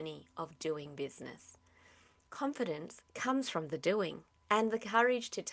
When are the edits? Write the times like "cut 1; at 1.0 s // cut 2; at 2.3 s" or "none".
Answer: cut 1; at 4.4 s